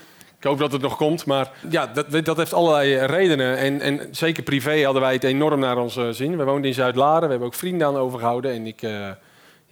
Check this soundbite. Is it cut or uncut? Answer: cut